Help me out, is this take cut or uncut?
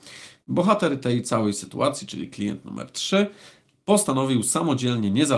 uncut